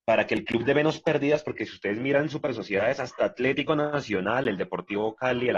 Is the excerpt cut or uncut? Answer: uncut